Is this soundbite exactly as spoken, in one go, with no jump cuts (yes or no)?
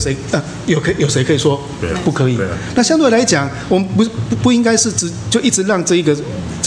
yes